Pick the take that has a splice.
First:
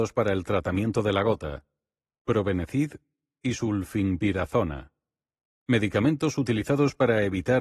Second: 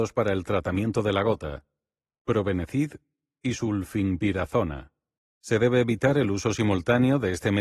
second; 1 cut; at 5.2 s

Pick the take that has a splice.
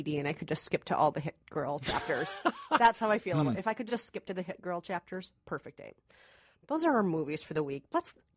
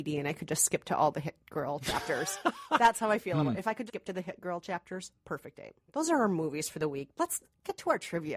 second; 2 cuts; at 3.9 s, 5.8 s

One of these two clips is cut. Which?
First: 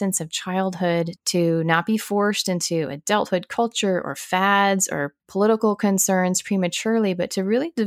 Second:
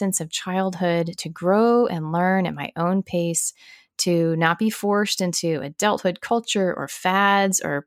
first; 2 cuts; at 1.2 s, 5.2 s

